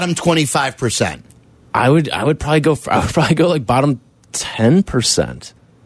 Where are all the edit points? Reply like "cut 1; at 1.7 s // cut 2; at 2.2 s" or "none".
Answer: none